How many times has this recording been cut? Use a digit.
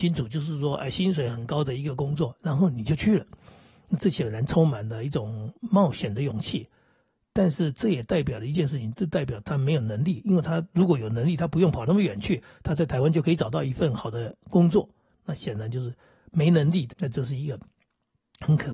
1